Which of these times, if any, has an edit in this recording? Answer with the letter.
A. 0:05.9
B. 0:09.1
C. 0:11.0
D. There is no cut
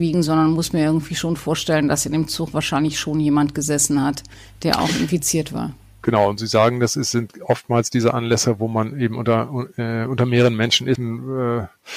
C